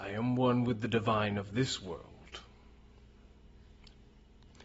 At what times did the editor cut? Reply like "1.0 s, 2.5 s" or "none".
none